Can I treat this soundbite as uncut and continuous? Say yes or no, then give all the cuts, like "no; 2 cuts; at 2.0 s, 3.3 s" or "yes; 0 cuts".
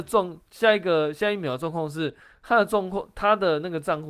yes; 0 cuts